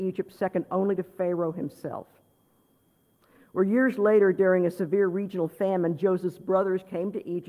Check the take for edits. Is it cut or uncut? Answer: uncut